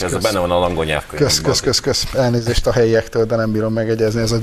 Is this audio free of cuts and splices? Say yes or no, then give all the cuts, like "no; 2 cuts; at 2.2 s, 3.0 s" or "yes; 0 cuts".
yes; 0 cuts